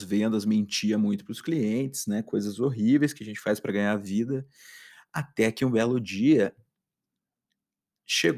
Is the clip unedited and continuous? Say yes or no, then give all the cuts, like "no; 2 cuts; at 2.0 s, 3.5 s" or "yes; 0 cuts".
yes; 0 cuts